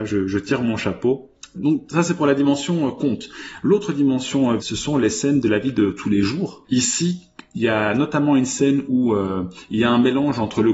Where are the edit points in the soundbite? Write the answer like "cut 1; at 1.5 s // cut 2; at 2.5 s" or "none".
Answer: cut 1; at 1.5 s // cut 2; at 4.6 s // cut 3; at 6.6 s